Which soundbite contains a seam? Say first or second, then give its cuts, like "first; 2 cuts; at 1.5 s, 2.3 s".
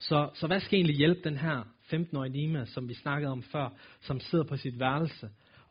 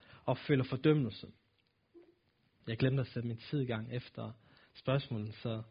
second; 1 cut; at 2.6 s